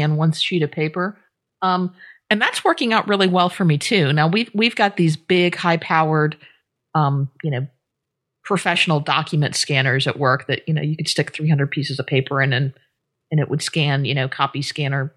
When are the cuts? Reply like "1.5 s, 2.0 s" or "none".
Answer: none